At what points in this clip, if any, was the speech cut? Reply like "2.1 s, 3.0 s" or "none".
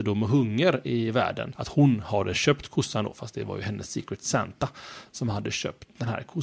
1.5 s